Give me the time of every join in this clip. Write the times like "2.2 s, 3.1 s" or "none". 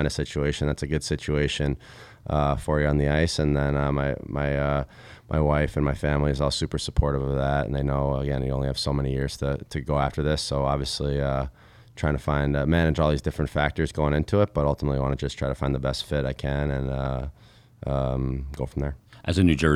none